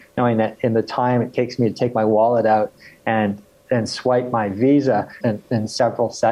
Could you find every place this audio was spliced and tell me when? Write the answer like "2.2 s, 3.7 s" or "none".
5.2 s